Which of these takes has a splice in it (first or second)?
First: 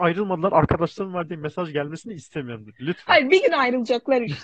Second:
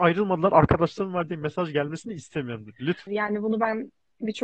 second